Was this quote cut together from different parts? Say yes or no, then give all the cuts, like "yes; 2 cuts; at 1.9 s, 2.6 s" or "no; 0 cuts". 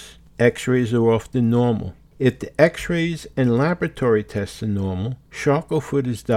yes; 1 cut; at 5.3 s